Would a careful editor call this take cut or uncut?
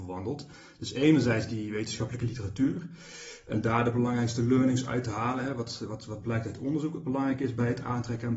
uncut